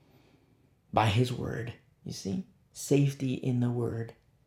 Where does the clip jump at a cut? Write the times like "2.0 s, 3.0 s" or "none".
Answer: none